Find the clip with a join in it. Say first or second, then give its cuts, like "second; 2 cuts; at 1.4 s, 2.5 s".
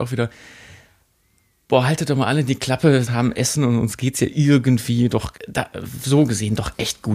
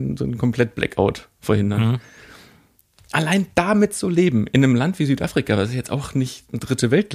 first; 2 cuts; at 3.1 s, 5.4 s